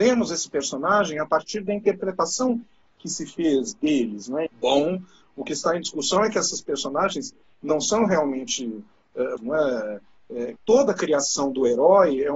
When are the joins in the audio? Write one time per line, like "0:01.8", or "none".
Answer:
0:04.5
0:09.4
0:10.6